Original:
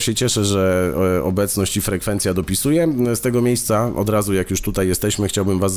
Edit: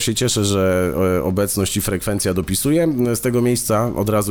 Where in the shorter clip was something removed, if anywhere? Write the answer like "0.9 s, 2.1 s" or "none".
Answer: none